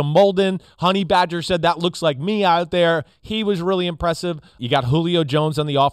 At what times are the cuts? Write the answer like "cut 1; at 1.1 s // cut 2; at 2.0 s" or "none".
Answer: cut 1; at 4.6 s